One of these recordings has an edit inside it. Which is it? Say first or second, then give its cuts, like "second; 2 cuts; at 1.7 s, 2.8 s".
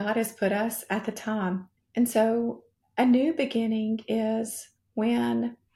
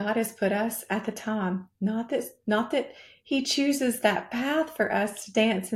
first; 1 cut; at 1.8 s